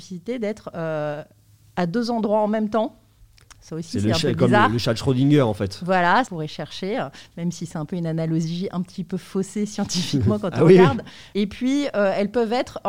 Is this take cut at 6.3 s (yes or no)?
yes